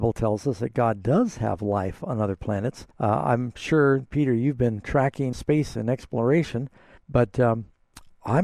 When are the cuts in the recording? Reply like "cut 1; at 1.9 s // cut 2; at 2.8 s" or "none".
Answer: cut 1; at 2.9 s // cut 2; at 5.3 s // cut 3; at 7.0 s